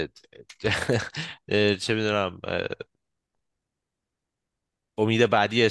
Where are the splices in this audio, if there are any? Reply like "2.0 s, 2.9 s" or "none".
none